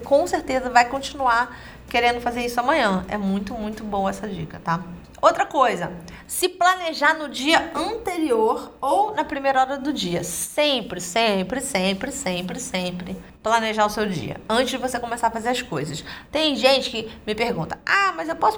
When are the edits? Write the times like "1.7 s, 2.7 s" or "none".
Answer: none